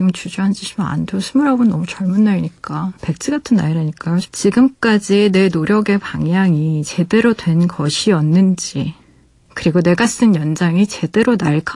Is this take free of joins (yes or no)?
no